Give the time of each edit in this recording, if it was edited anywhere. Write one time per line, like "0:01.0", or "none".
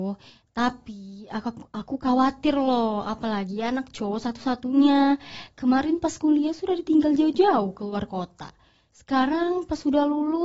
none